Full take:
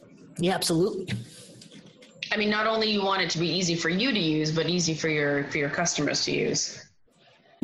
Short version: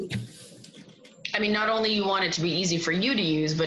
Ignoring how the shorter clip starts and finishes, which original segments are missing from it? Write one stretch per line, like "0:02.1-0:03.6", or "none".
none